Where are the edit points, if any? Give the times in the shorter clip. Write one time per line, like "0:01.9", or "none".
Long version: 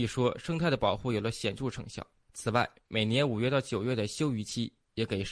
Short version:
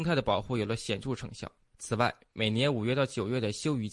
none